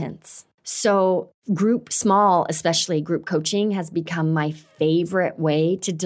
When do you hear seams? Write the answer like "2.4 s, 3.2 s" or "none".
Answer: none